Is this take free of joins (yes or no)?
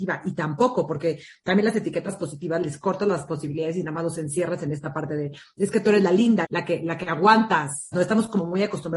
no